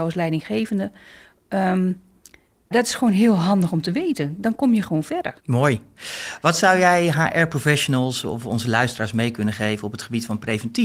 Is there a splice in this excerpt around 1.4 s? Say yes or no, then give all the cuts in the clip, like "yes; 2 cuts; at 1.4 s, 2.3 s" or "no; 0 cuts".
no; 2 cuts; at 2.7 s, 5.4 s